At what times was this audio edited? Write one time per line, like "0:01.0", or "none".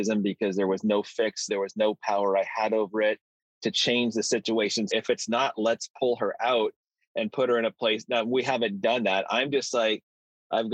0:01.5
0:04.9